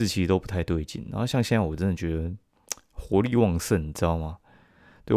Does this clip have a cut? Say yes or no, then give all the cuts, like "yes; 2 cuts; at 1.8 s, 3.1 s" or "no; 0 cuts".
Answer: no; 0 cuts